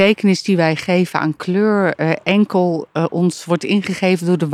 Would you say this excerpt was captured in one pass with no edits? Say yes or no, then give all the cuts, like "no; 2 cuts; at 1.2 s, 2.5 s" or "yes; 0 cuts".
yes; 0 cuts